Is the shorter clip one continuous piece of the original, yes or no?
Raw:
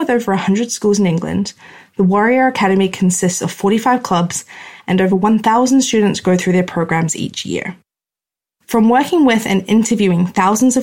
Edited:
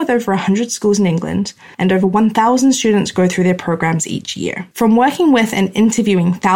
no